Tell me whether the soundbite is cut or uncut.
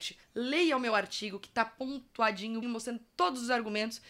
cut